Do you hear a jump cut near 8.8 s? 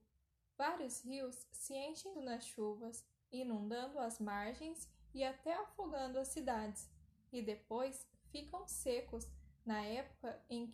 no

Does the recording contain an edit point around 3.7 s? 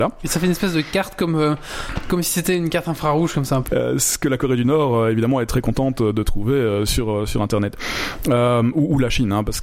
yes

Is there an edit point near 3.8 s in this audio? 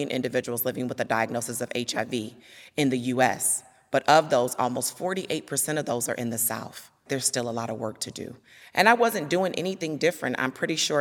no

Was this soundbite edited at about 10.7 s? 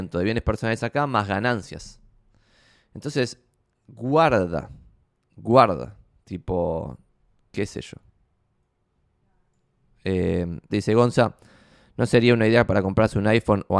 yes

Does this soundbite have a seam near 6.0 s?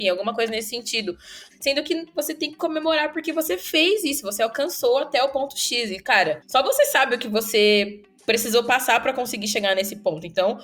no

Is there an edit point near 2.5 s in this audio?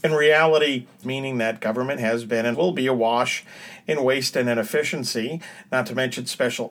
yes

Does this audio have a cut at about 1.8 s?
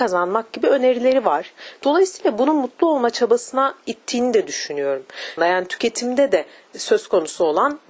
no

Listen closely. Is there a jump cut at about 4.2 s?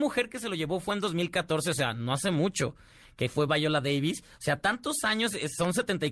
no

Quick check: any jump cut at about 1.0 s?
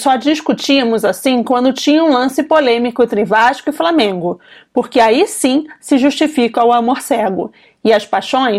no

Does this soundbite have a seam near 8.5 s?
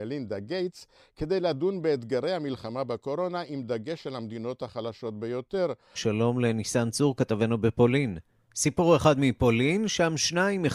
yes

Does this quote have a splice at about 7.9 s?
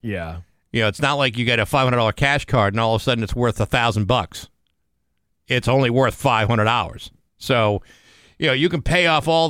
no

